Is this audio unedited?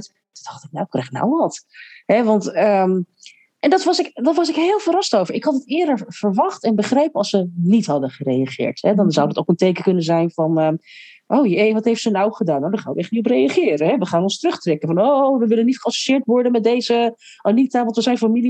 yes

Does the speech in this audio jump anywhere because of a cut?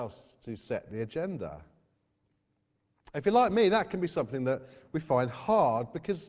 no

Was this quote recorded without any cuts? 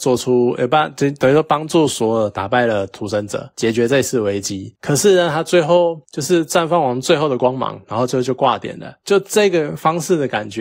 yes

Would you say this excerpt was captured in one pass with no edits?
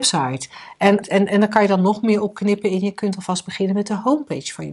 no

